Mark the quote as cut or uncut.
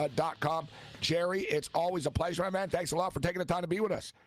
uncut